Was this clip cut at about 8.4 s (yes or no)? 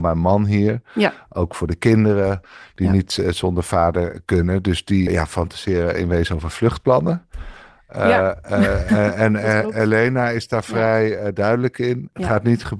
no